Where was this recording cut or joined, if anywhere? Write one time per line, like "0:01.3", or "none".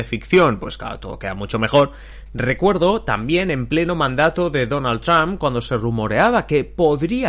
0:02.3